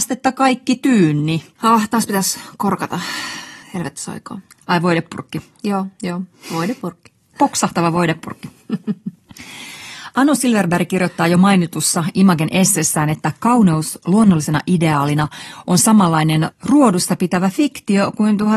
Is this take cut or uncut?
cut